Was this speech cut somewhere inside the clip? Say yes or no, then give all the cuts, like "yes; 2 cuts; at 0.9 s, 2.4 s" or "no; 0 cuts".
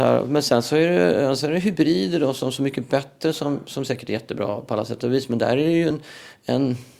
no; 0 cuts